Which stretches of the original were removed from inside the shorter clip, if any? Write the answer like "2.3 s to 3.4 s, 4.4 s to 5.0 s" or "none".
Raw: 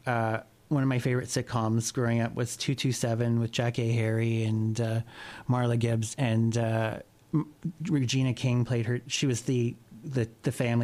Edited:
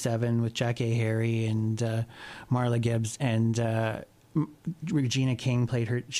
none

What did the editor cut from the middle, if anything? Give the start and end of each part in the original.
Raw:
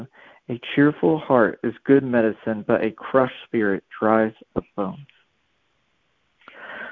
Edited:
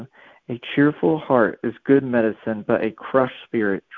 none

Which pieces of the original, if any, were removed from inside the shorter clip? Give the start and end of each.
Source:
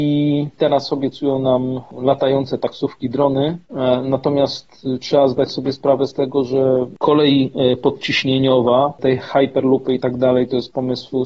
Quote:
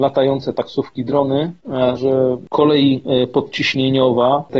4.0 s to 6.5 s

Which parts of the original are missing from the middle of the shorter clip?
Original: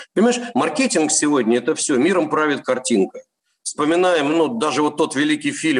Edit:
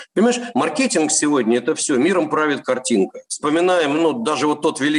3.3 s to 3.6 s

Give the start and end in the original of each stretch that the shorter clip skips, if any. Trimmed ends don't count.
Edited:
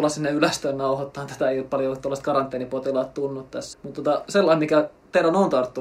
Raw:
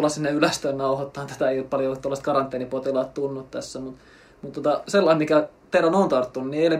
3.7 s to 4.3 s

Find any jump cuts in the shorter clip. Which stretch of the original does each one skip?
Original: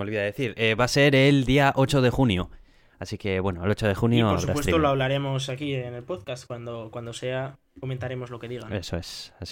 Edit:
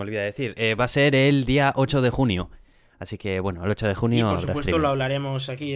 none

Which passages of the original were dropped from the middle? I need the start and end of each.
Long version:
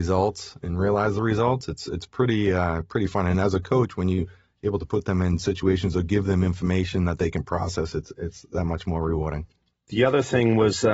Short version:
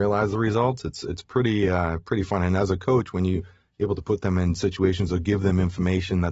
none

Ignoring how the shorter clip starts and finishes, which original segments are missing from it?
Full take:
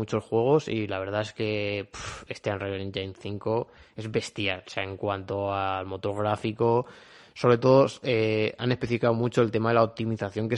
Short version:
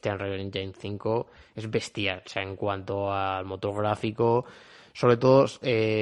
none

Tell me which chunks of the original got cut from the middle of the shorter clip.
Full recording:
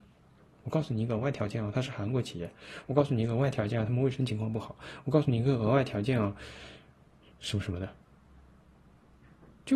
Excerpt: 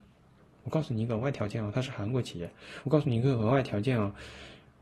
2.8 s to 5.0 s

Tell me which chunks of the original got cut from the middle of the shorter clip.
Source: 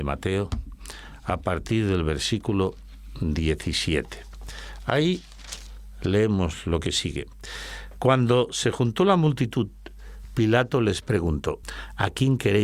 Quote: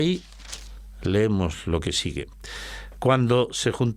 none

